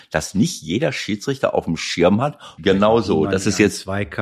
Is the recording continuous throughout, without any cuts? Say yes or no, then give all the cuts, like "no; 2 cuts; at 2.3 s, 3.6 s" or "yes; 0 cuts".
no; 1 cut; at 2.6 s